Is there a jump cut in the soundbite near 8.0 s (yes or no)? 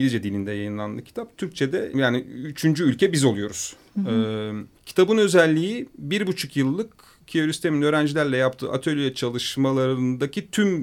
no